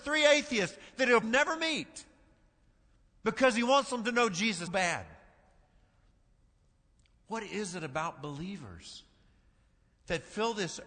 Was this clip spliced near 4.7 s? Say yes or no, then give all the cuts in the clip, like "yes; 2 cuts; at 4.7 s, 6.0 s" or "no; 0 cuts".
yes; 2 cuts; at 1.2 s, 4.7 s